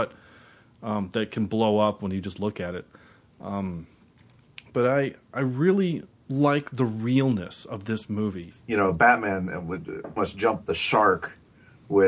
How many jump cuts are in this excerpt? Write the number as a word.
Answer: two